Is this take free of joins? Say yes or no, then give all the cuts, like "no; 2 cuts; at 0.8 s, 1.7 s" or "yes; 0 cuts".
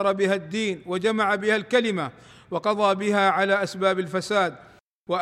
yes; 0 cuts